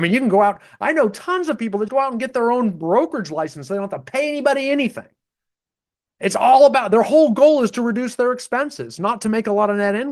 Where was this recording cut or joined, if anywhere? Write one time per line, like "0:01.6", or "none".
0:01.9